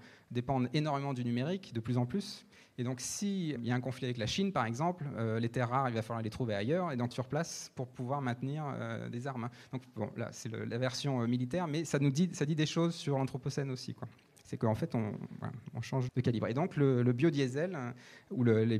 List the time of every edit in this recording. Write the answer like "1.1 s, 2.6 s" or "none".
3.6 s, 7.1 s, 16.1 s